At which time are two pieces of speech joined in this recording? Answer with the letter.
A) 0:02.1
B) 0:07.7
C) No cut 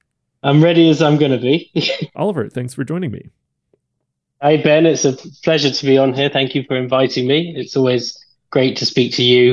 A